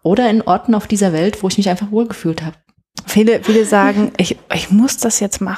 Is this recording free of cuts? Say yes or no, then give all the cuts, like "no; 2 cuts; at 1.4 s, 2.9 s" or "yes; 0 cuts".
no; 1 cut; at 3.0 s